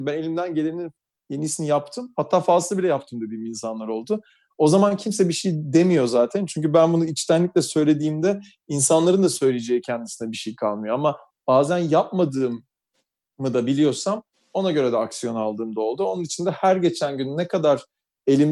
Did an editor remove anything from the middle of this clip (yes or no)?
no